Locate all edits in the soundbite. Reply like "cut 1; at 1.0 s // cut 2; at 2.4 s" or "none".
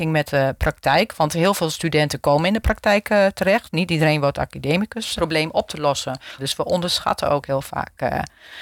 cut 1; at 5.2 s // cut 2; at 6.4 s